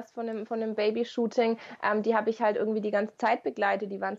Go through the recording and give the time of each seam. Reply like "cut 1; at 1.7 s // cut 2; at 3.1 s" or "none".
none